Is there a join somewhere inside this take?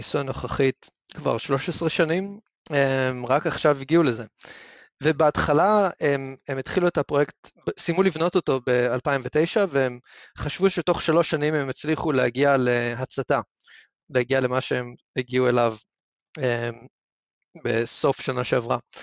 no; 0 cuts

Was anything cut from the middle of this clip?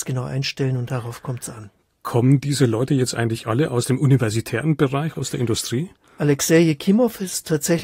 yes; 1 cut; at 5.1 s

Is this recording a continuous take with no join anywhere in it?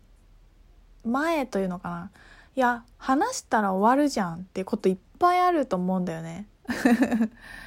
no; 2 cuts; at 2.9 s, 6.6 s

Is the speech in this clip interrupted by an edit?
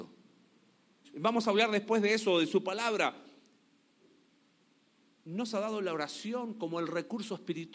yes; 1 cut; at 1.0 s

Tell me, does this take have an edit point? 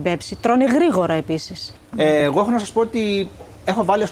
no; 0 cuts

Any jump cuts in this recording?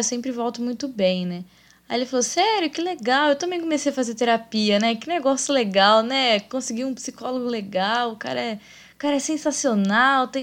no; 0 cuts

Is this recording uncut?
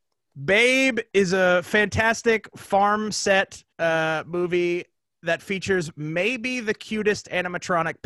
no; 1 cut; at 3.7 s

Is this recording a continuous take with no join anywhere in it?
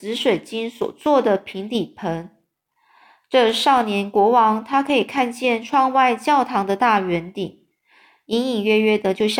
yes; 0 cuts

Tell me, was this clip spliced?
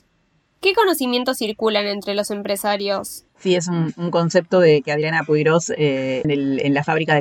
yes; 2 cuts; at 3.3 s, 6.2 s

